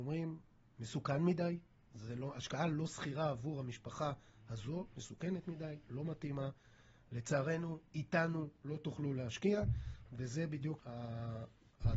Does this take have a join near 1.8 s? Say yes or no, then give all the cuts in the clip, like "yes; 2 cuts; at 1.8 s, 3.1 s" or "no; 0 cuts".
no; 1 cut; at 10.8 s